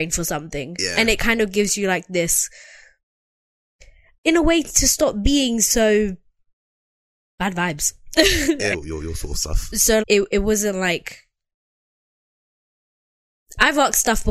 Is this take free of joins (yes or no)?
no